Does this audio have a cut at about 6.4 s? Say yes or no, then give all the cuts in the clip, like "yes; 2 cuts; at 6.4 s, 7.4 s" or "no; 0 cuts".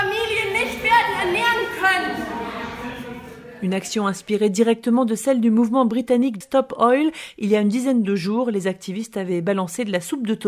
yes; 1 cut; at 6.4 s